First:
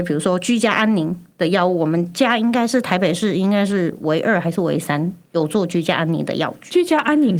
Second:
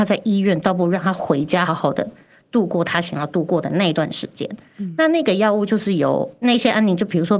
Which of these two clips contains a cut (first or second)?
second